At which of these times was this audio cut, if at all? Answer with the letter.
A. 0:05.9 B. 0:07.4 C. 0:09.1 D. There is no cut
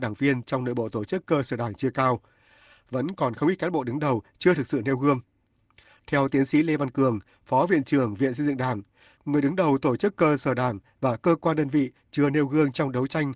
C